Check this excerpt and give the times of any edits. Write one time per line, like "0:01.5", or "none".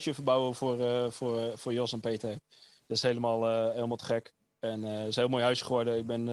none